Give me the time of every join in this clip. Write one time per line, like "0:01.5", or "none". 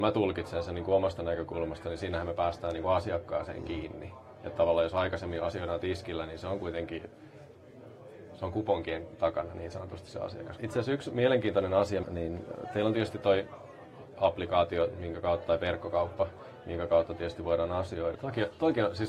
0:10.6
0:12.0
0:18.1